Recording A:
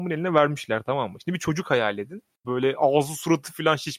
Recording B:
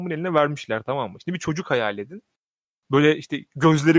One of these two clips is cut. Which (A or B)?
A